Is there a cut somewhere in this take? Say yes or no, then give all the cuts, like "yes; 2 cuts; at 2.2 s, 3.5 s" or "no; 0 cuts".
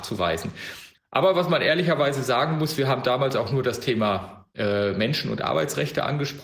yes; 1 cut; at 1.0 s